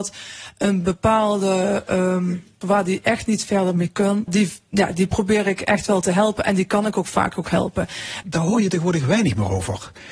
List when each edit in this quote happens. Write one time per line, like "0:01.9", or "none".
0:02.6
0:04.3
0:08.2